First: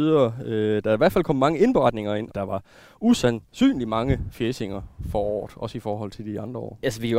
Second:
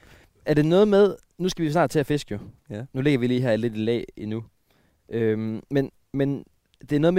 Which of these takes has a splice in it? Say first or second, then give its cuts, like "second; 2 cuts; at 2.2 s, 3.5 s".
first; 2 cuts; at 2.3 s, 3.5 s